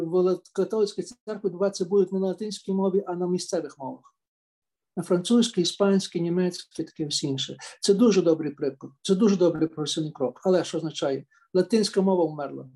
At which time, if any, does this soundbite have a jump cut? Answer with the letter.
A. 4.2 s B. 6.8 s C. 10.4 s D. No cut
B